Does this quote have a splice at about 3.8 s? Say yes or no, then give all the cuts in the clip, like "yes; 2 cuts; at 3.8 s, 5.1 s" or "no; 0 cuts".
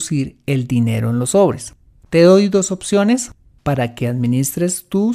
no; 1 cut; at 2.1 s